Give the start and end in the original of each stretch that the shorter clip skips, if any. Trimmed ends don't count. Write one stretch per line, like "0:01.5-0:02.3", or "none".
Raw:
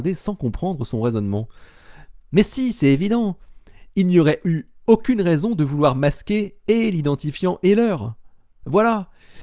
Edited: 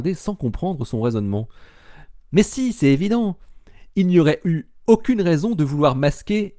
none